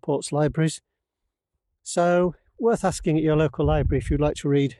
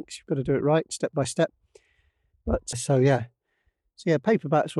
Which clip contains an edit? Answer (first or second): second